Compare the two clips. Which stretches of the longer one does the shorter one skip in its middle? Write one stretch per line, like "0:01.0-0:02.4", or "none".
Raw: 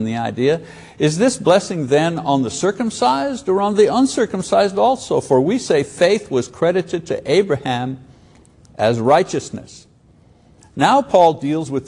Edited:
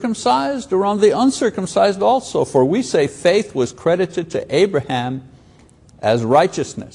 none